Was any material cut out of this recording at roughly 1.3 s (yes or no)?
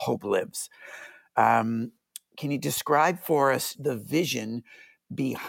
no